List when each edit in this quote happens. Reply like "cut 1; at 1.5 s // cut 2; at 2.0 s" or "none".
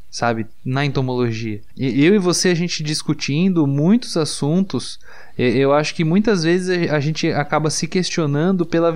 cut 1; at 1.7 s